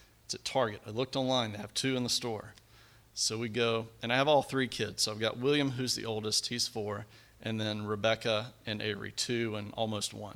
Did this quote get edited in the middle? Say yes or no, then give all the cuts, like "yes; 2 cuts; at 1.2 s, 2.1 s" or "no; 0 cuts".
no; 0 cuts